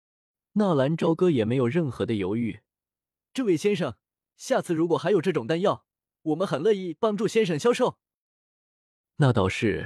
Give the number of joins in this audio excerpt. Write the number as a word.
one